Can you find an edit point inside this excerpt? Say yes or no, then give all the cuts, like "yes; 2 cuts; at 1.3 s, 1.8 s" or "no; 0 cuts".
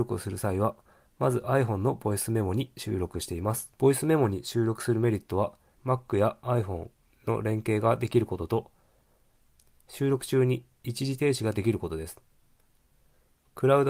yes; 2 cuts; at 3.8 s, 5.7 s